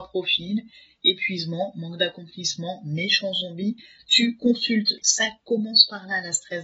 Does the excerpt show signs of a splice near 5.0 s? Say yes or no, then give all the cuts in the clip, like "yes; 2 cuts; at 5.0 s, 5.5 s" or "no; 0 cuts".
yes; 1 cut; at 5.0 s